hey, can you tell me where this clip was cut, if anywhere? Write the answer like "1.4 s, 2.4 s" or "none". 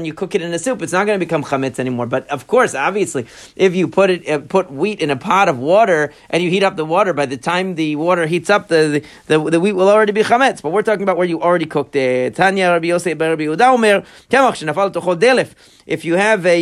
none